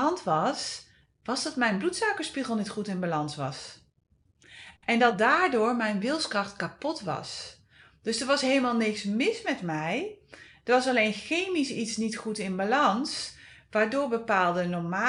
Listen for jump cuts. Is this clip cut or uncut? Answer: uncut